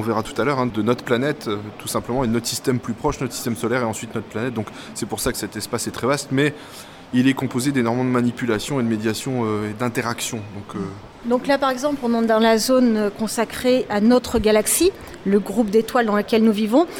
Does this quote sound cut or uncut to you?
cut